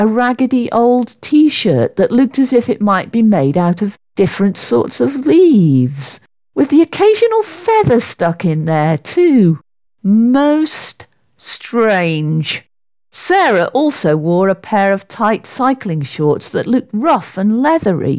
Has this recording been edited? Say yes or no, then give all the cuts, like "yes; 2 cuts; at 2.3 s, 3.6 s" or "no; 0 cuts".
no; 0 cuts